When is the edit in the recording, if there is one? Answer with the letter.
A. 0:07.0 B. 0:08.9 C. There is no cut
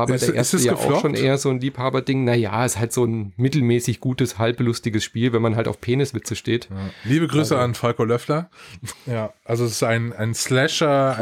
B